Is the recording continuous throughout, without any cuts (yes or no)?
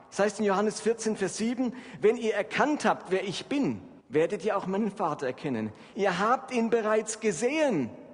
no